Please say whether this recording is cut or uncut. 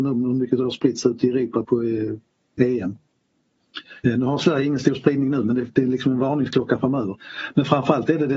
cut